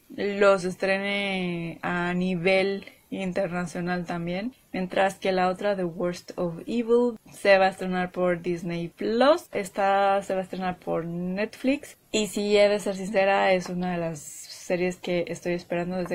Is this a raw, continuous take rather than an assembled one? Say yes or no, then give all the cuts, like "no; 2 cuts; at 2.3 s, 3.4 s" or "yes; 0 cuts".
no; 2 cuts; at 4.7 s, 9.5 s